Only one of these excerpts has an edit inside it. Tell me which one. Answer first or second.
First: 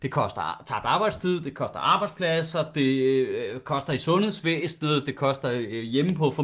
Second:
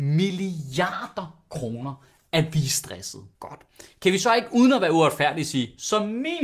second